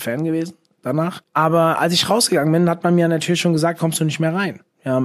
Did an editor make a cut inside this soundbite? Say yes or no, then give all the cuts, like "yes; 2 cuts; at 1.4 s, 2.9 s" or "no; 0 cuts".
yes; 2 cuts; at 1.2 s, 3.8 s